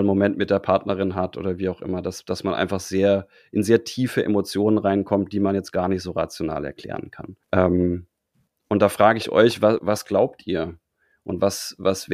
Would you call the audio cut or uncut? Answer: cut